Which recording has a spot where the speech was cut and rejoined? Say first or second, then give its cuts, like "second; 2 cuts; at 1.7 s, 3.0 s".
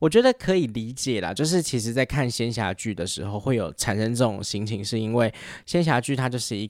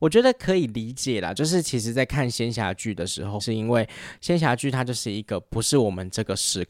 second; 1 cut; at 3.4 s